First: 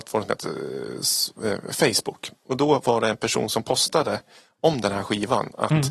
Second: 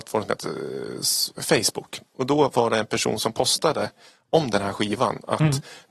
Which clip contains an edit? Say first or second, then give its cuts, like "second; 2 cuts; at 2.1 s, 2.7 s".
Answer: second; 1 cut; at 1.4 s